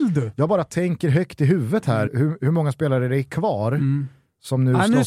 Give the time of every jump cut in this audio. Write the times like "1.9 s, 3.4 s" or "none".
2.1 s

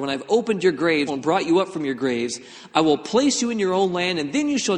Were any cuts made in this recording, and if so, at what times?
1.1 s, 2.7 s

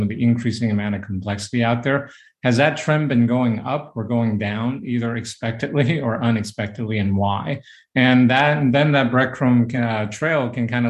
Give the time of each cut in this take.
none

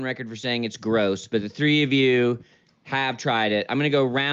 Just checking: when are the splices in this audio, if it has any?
none

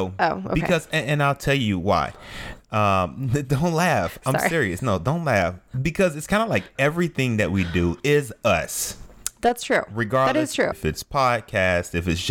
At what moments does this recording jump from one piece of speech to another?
10.7 s

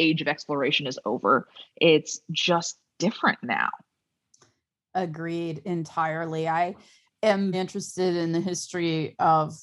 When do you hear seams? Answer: 7.5 s

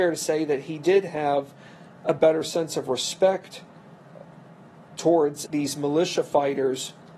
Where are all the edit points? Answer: 5.5 s

